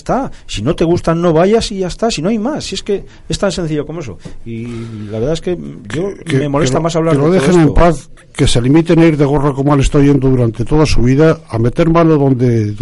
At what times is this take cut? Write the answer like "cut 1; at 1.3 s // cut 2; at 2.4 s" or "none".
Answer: cut 1; at 6.2 s